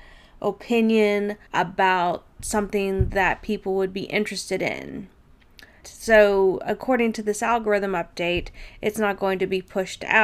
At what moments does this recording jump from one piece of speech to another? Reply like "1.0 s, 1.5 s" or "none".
1.5 s, 5.8 s

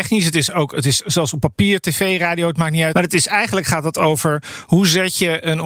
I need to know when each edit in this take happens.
2.9 s

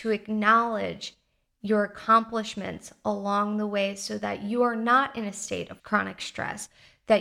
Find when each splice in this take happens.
none

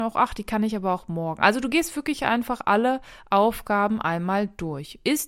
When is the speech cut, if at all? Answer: none

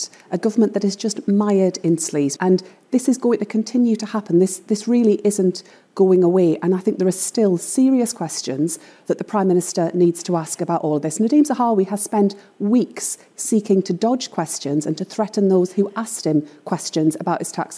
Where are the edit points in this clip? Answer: 2.4 s

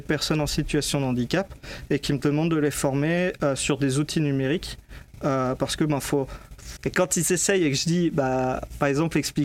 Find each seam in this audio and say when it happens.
6.8 s

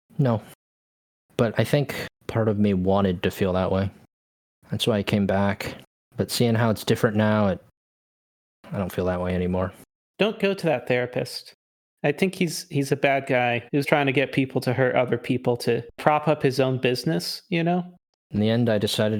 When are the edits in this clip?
13.8 s, 18.1 s

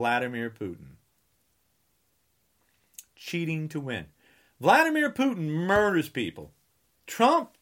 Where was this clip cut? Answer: none

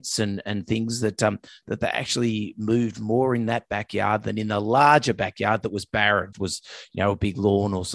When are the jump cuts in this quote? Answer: 6.3 s

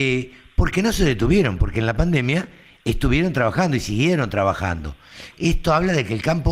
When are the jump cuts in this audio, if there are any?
5.3 s

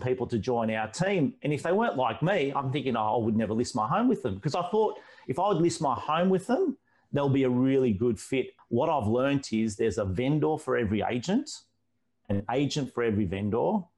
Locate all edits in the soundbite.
8.6 s

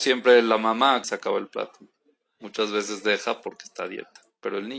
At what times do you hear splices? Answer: 1.0 s

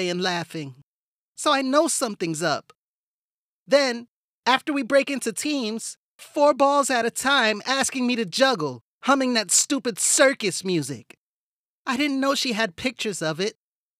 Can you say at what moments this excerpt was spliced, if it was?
6.2 s, 11.7 s

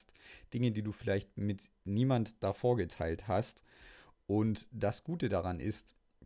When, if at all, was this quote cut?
none

